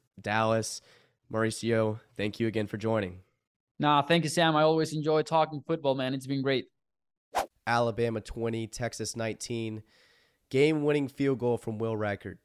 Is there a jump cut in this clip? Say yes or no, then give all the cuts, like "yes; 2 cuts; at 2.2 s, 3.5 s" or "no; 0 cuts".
yes; 1 cut; at 7.6 s